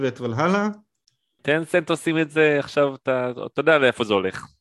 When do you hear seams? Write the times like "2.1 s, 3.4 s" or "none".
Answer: 1.4 s